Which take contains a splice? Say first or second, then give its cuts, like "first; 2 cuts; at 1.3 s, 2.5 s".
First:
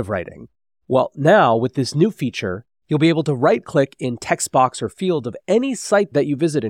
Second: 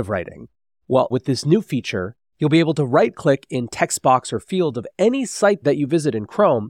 second; 1 cut; at 1.1 s